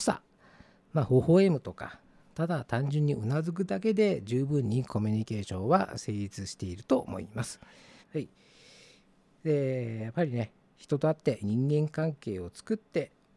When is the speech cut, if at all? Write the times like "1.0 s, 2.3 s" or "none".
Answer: 8.0 s, 11.4 s